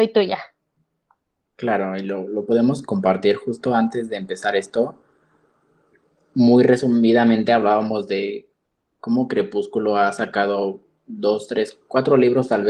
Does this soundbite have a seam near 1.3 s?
no; 0 cuts

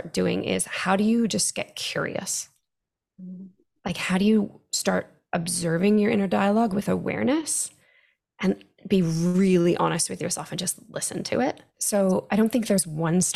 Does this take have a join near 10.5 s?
no; 1 cut; at 11.7 s

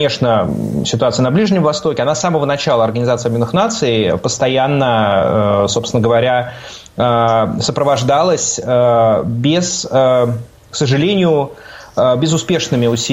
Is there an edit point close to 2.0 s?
no; 0 cuts

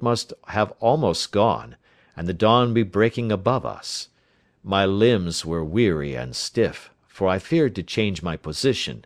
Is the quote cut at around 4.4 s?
no; 0 cuts

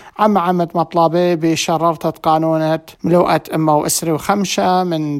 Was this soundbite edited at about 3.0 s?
yes; 1 cut; at 3.0 s

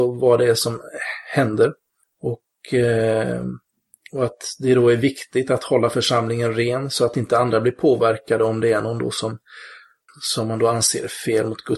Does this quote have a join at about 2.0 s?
yes; 2 cuts; at 2.0 s, 10.1 s

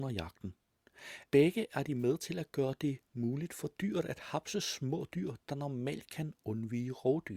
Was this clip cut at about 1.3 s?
yes; 1 cut; at 1.3 s

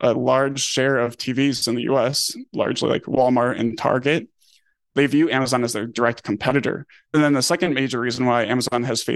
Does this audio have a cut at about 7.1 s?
yes; 1 cut; at 7.1 s

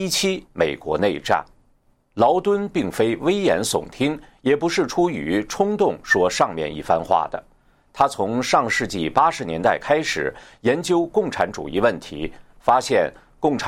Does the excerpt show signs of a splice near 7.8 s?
no; 0 cuts

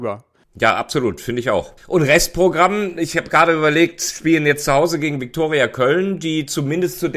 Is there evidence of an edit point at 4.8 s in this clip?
no; 1 cut; at 1.8 s

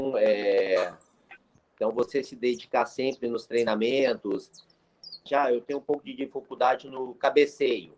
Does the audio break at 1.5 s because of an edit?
yes; 2 cuts; at 1.5 s, 5.3 s

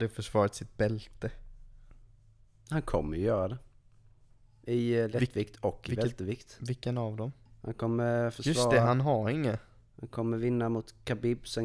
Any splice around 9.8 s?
no; 0 cuts

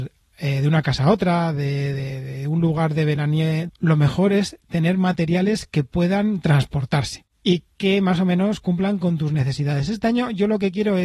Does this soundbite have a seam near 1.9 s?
no; 1 cut; at 3.7 s

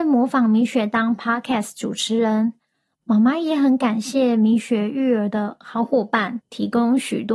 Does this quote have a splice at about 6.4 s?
yes; 1 cut; at 6.4 s

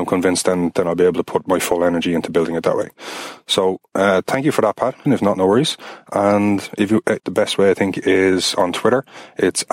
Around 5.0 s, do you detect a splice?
yes; 2 cuts; at 5.0 s, 7.2 s

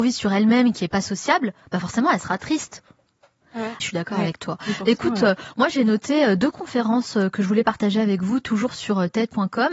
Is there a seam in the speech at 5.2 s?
no; 1 cut; at 3.8 s

